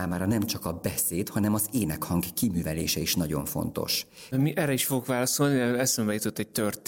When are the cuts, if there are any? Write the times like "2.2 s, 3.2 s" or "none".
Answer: 4.3 s